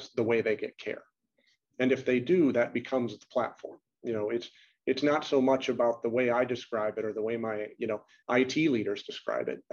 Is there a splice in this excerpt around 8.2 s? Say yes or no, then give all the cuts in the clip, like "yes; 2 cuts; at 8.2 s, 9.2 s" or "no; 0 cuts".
yes; 1 cut; at 8.2 s